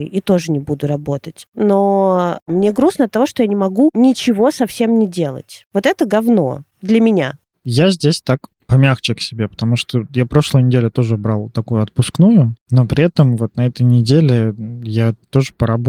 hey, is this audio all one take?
yes; 0 cuts

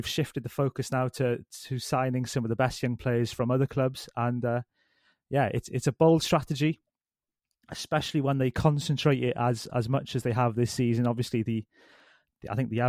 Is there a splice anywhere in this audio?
no; 0 cuts

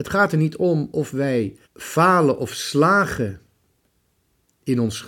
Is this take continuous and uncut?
no; 1 cut; at 1.6 s

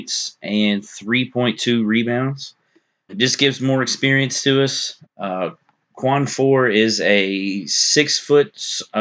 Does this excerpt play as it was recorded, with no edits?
no; 2 cuts; at 3.1 s, 5.0 s

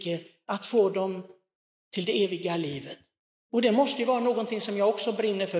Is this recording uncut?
yes; 0 cuts

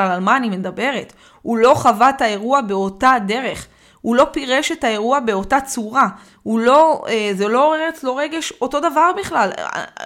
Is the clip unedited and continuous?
yes; 0 cuts

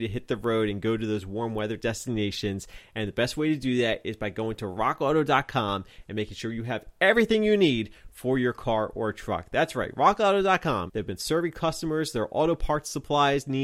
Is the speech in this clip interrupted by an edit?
yes; 1 cut; at 10.9 s

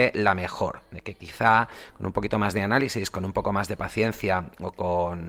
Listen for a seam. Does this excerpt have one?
no; 0 cuts

